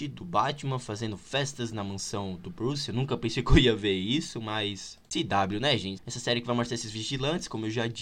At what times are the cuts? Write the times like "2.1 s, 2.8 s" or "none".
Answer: 6.0 s